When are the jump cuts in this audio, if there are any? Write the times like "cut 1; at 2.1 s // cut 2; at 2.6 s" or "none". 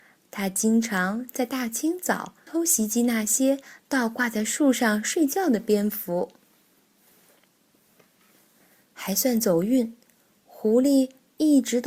cut 1; at 2.5 s